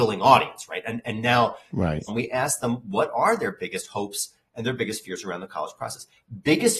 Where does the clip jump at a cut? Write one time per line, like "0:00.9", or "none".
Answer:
0:02.1